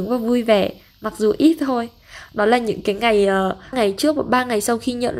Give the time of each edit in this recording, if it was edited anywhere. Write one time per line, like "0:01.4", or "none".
0:03.7